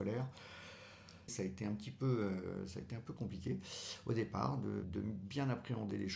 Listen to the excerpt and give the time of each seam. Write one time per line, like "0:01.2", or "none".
0:01.3